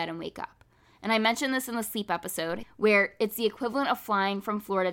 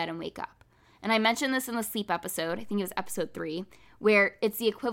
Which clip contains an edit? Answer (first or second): first